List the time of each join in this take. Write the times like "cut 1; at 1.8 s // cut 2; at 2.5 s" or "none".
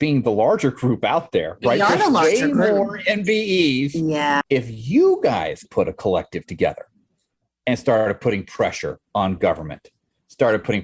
cut 1; at 4.4 s // cut 2; at 5.6 s // cut 3; at 9.1 s